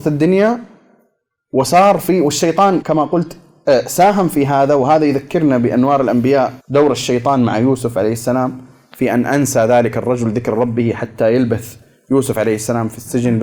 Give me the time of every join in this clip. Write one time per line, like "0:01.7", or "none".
0:02.8
0:06.6